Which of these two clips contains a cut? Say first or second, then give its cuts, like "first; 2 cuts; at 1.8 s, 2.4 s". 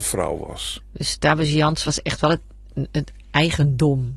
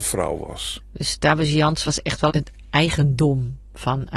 second; 1 cut; at 2.3 s